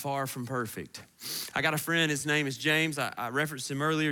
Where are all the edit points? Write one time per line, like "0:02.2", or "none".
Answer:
none